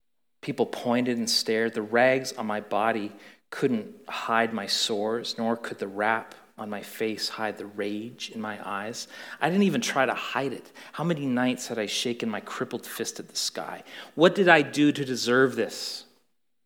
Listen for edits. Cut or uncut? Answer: uncut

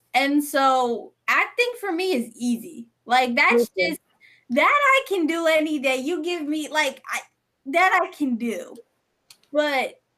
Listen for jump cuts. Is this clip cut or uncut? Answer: uncut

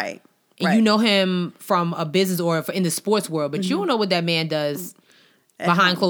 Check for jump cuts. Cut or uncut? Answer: uncut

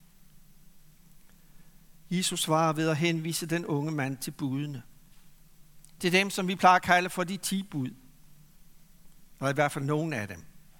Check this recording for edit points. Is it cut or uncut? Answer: uncut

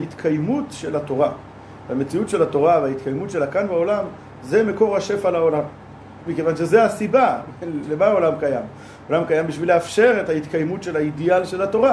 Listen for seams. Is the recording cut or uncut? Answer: cut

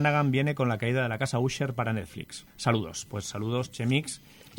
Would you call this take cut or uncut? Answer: cut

